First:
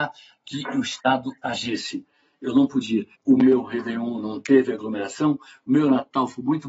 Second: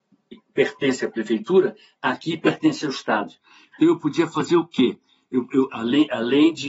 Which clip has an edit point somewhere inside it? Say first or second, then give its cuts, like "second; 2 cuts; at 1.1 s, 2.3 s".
first; 1 cut; at 3.2 s